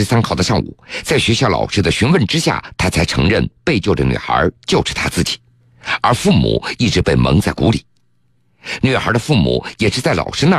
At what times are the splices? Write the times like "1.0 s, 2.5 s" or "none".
none